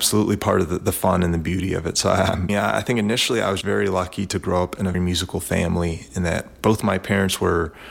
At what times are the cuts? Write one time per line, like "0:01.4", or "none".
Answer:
0:02.5
0:03.6
0:04.9

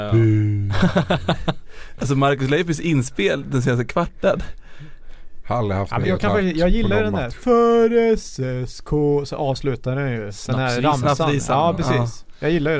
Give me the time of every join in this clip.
0:06.0

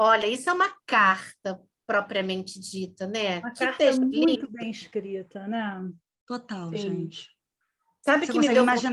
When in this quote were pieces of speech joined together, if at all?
none

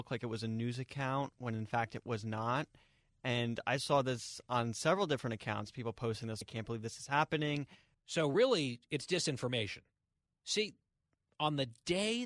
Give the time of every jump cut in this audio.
0:06.4
0:07.9

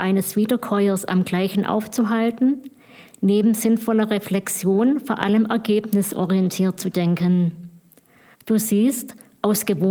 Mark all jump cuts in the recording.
0:08.3

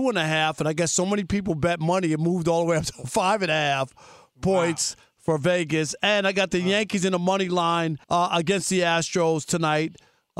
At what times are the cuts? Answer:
0:08.0

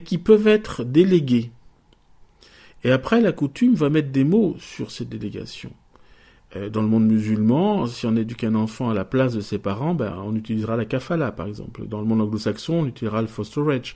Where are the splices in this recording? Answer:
none

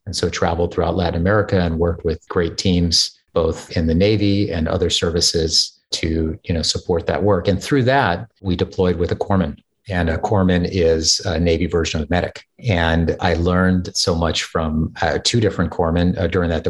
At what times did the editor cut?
none

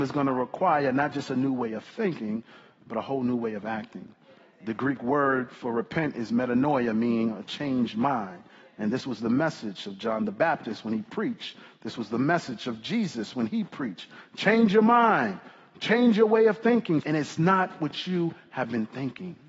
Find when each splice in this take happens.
0:17.0

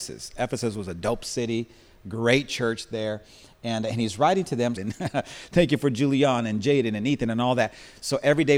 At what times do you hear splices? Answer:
0:04.8

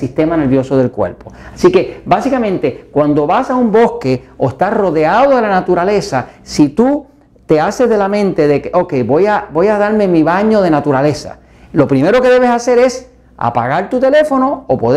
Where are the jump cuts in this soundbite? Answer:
none

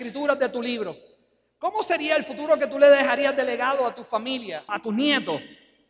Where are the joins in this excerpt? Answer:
0:04.7

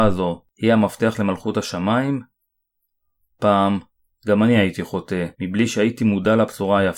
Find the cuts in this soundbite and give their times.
0:05.3

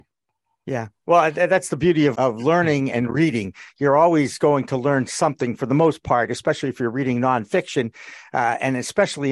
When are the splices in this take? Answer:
0:02.1

